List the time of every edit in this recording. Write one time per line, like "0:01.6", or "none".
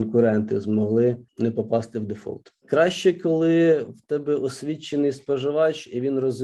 none